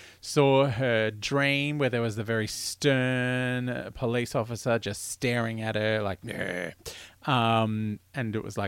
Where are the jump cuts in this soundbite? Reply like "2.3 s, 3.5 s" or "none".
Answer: none

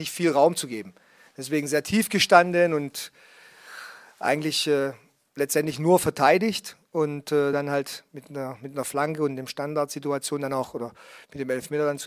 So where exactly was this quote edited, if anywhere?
none

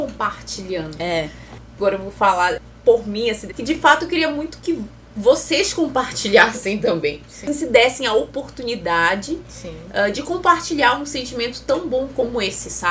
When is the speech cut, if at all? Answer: 3.5 s

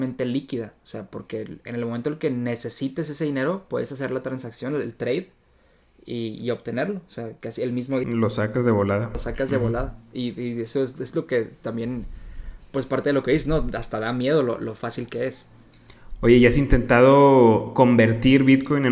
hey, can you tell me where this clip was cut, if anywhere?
none

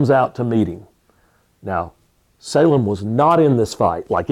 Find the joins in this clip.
none

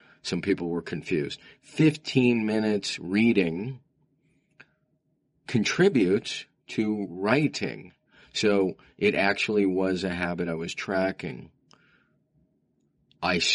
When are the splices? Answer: none

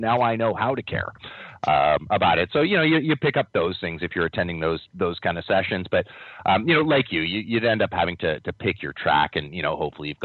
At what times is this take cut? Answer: none

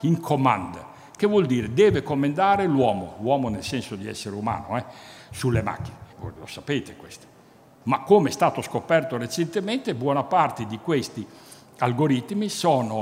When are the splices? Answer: 6.1 s, 7.8 s

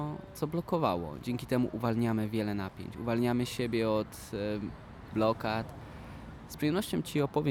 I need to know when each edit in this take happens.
5.1 s

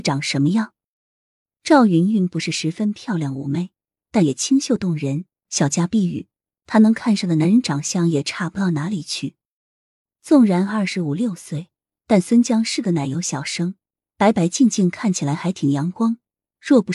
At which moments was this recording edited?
none

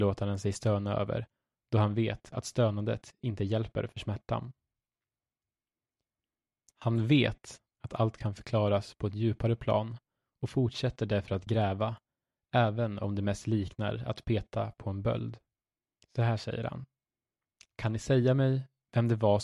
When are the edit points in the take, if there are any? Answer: 16.0 s

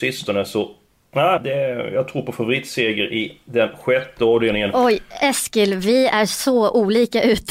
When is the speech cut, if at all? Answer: 1.4 s

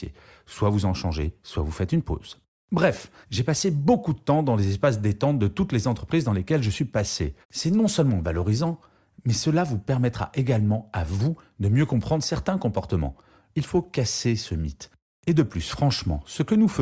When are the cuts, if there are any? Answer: 3.2 s, 7.4 s, 13.5 s

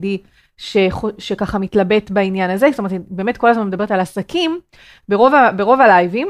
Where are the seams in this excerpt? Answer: none

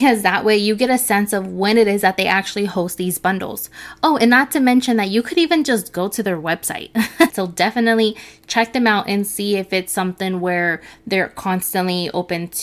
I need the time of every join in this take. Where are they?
7.3 s

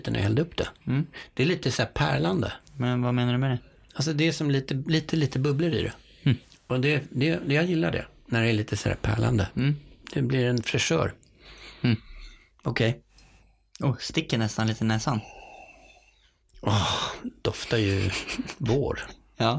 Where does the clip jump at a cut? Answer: none

